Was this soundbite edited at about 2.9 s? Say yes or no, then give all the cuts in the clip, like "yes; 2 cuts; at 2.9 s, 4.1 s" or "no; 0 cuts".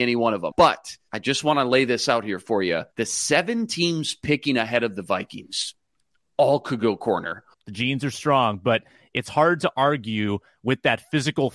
yes; 2 cuts; at 2.9 s, 7.5 s